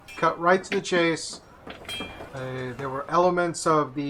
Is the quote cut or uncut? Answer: cut